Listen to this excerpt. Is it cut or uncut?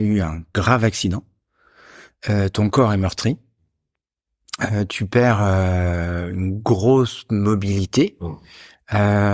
uncut